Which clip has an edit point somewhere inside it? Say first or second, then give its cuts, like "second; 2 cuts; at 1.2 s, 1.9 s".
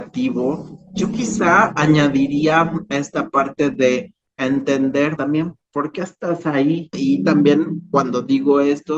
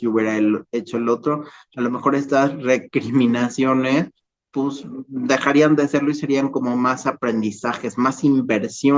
first; 2 cuts; at 5.2 s, 6.9 s